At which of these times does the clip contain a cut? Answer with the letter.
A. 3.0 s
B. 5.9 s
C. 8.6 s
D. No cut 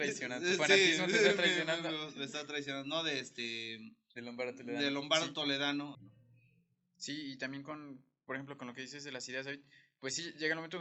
B